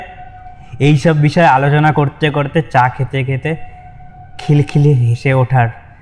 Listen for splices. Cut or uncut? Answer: uncut